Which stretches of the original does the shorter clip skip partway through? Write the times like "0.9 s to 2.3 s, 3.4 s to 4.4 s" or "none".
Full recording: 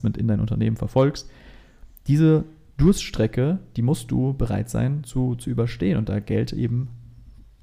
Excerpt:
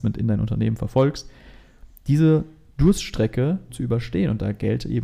3.7 s to 5.4 s